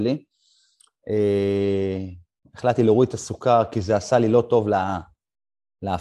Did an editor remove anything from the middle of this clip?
no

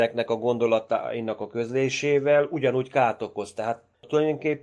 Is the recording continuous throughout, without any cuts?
yes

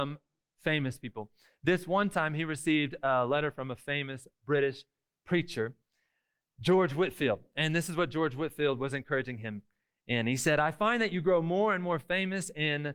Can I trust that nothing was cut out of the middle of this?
yes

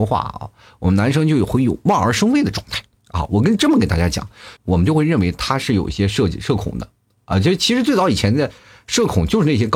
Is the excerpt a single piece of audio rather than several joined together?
no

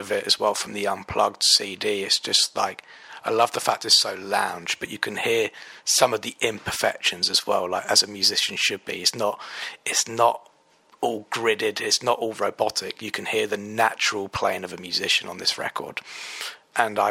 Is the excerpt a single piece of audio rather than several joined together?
yes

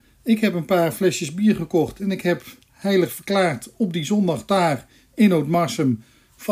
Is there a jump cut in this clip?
no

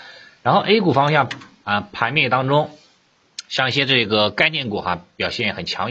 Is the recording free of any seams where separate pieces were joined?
yes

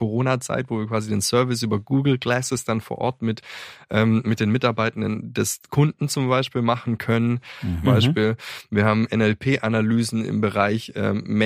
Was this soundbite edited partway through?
yes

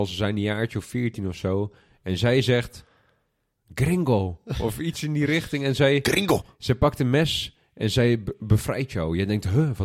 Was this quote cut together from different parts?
no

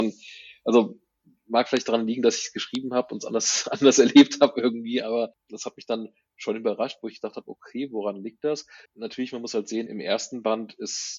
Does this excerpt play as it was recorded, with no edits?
no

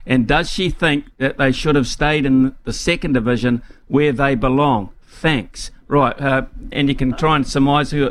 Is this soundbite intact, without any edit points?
no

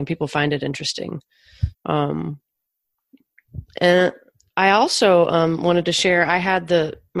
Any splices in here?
yes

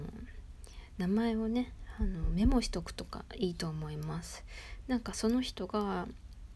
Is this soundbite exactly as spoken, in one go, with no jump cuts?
yes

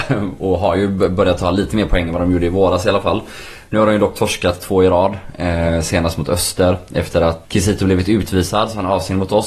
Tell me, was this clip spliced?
yes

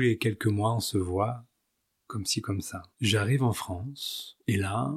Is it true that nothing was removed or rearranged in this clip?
no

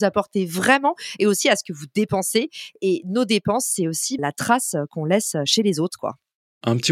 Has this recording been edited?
yes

